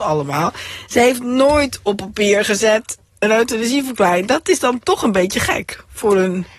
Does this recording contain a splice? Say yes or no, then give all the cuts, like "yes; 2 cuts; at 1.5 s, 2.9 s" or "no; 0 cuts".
no; 0 cuts